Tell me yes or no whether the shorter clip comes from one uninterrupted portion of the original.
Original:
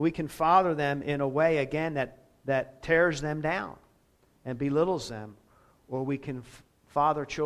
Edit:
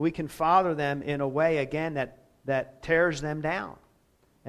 yes